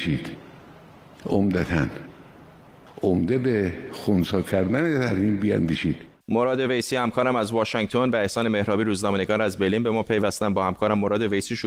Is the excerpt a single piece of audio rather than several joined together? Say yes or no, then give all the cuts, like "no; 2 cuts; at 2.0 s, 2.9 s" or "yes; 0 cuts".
no; 1 cut; at 6.2 s